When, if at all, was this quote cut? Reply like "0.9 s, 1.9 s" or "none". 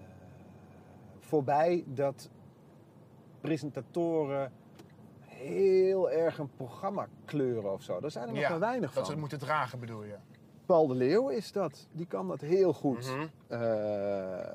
none